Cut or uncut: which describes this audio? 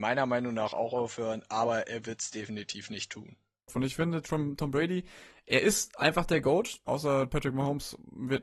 cut